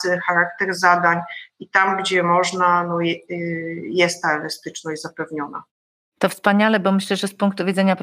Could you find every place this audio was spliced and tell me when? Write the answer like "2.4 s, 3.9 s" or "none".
none